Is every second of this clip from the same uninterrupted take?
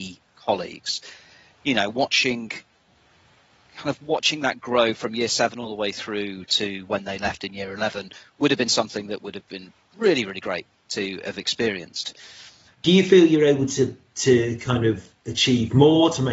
no; 1 cut; at 12.7 s

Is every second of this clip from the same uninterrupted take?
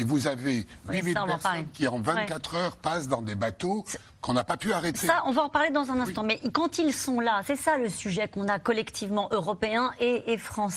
yes; 0 cuts

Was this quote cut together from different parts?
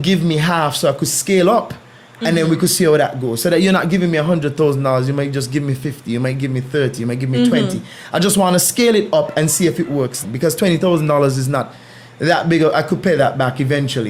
yes; 1 cut; at 10.2 s

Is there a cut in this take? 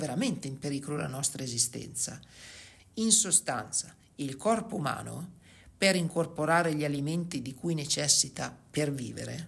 yes; 1 cut; at 2.8 s

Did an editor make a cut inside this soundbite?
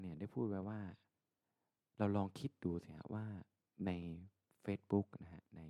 no; 0 cuts

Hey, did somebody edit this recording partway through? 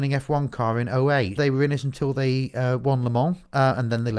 yes; 1 cut; at 1.4 s

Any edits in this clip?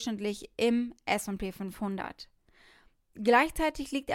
no; 0 cuts

